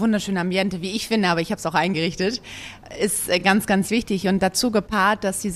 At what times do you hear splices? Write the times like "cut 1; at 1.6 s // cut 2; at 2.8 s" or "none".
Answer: none